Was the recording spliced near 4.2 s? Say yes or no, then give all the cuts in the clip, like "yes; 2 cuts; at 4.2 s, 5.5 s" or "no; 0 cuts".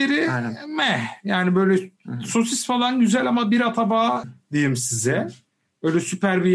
yes; 1 cut; at 4.2 s